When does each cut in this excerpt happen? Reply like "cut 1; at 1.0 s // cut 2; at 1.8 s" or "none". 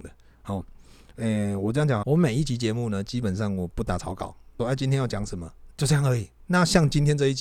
cut 1; at 2.0 s // cut 2; at 4.6 s // cut 3; at 5.7 s